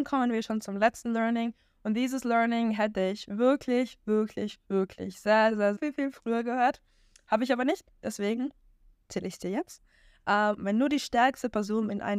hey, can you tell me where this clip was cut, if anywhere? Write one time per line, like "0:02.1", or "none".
0:05.8
0:10.6